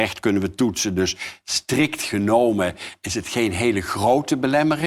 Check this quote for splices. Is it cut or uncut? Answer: uncut